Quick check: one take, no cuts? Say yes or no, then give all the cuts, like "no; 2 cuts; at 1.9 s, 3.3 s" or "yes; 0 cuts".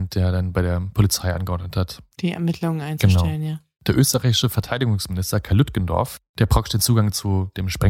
no; 1 cut; at 3.8 s